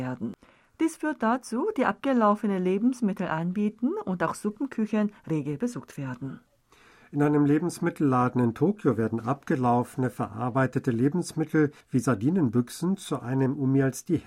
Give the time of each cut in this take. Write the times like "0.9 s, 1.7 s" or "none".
1.7 s, 11.8 s